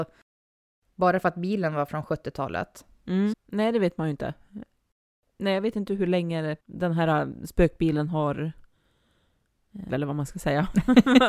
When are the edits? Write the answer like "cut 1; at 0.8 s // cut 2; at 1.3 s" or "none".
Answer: cut 1; at 3.3 s // cut 2; at 6.6 s // cut 3; at 9.9 s